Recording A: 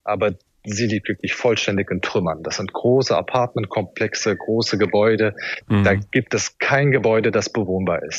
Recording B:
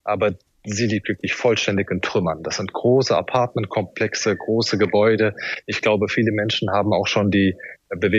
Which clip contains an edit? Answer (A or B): A